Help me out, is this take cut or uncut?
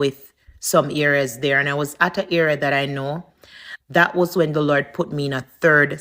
cut